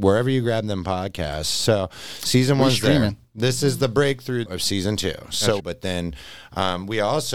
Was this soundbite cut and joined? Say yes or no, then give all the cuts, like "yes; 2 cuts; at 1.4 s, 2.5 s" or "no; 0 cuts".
yes; 2 cuts; at 4.5 s, 5.6 s